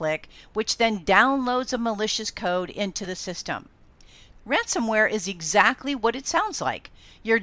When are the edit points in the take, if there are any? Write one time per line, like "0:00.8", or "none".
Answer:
0:04.3